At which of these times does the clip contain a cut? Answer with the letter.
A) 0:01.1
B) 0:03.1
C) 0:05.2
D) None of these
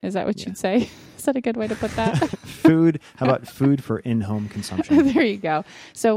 D